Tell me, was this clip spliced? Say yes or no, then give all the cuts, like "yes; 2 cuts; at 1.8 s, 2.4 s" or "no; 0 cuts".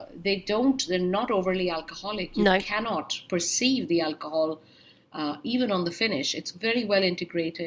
no; 0 cuts